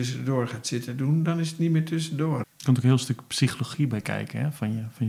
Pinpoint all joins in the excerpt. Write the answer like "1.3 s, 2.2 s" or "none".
2.4 s